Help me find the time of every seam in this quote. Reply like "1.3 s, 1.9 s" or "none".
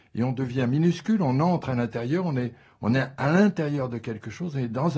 none